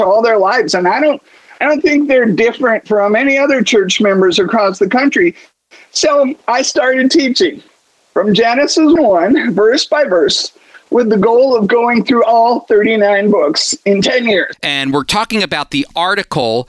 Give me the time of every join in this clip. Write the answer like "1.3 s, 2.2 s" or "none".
5.9 s, 9.0 s, 14.5 s